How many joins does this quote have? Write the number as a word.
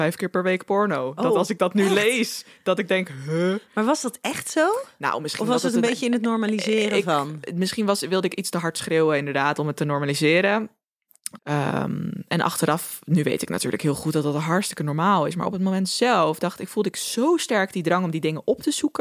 one